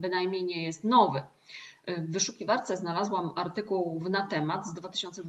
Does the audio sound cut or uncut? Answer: uncut